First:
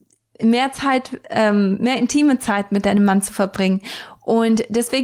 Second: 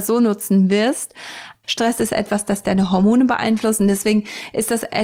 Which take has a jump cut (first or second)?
second